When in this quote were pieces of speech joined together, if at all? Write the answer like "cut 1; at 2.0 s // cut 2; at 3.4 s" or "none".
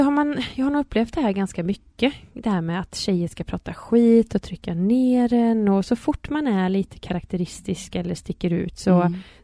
none